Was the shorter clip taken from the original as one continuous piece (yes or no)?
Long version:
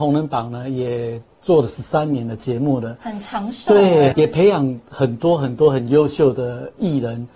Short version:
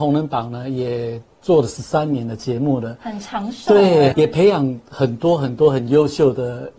yes